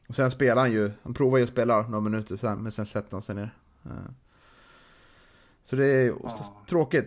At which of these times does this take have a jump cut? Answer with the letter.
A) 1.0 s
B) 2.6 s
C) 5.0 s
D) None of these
D